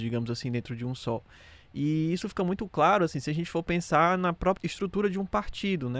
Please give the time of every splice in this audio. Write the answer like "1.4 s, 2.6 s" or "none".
none